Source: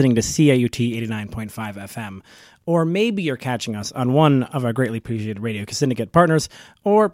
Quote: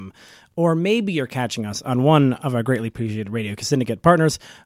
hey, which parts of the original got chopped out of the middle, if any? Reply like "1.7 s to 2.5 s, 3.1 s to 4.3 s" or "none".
none